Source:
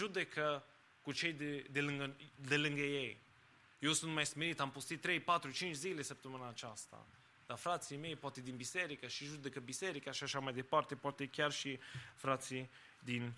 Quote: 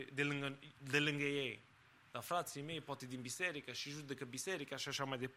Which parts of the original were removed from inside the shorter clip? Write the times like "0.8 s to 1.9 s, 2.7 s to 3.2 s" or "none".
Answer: 3.6 s to 7.3 s